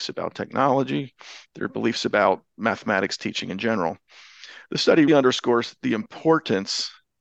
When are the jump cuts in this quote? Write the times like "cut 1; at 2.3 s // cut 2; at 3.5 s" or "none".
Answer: cut 1; at 5.1 s